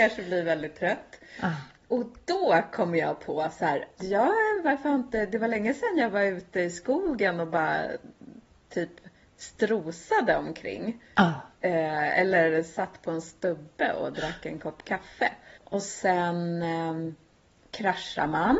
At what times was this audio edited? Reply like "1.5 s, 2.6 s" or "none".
4.0 s, 15.6 s